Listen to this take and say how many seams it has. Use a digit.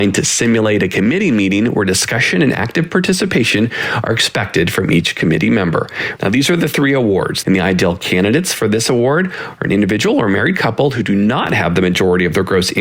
2